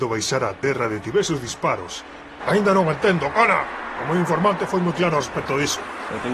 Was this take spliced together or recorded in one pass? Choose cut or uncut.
cut